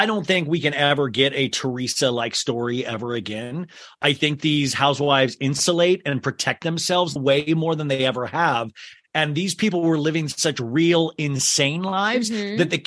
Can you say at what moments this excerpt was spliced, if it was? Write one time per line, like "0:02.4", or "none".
0:07.2
0:09.1